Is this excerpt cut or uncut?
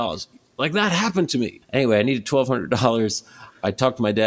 cut